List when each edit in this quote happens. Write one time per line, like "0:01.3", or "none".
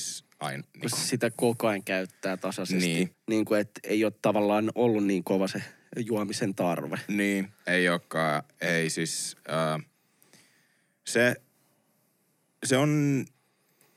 0:03.1